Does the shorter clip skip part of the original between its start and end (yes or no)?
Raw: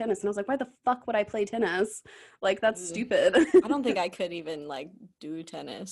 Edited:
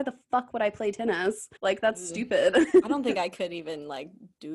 yes